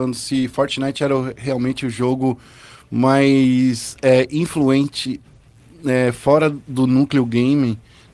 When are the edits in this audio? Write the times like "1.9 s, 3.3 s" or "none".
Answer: none

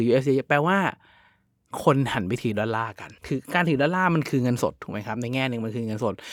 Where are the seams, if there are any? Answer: 3.2 s

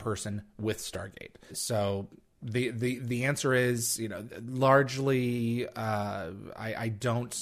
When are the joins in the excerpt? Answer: 1.5 s

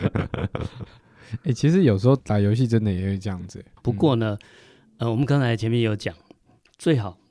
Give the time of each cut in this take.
2.2 s, 3.8 s

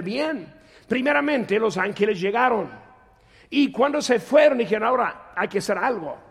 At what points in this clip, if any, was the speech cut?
none

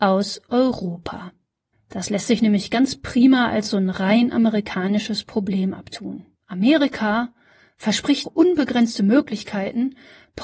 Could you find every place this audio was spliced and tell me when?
1.7 s, 6.4 s, 8.2 s

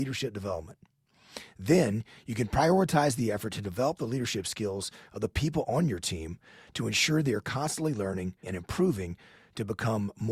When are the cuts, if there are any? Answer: 8.4 s

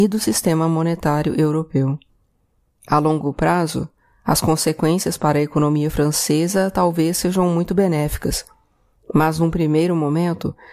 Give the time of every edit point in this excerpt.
none

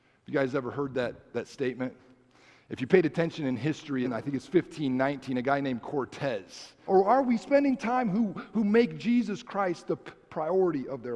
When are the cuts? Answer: 4.0 s, 6.8 s

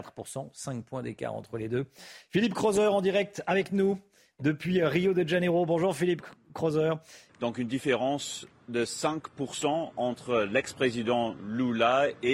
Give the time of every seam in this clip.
7.3 s

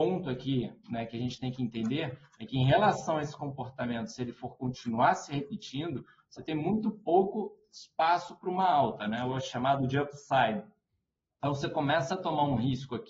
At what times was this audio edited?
none

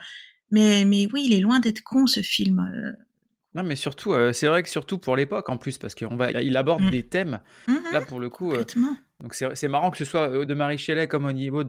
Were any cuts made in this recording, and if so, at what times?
6.3 s, 7.7 s, 10.5 s

